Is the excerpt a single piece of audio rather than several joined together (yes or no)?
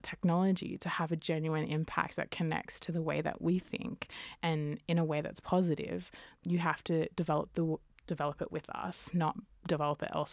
no